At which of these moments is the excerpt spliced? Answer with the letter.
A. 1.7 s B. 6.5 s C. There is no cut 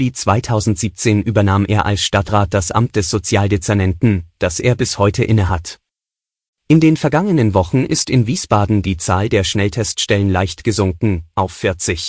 B